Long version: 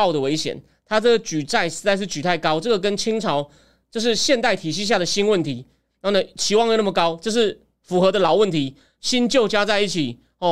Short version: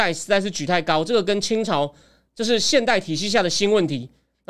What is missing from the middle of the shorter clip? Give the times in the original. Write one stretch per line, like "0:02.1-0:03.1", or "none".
none